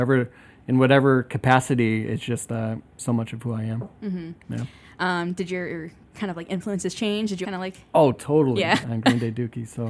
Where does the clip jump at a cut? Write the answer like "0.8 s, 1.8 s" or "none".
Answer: 7.4 s, 8.8 s